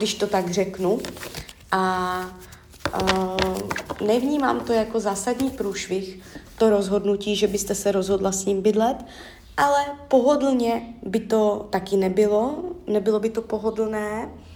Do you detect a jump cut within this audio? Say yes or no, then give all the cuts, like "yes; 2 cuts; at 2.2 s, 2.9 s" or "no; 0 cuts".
no; 0 cuts